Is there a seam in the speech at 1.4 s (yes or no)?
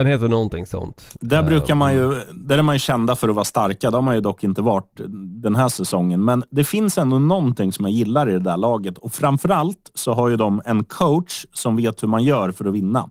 no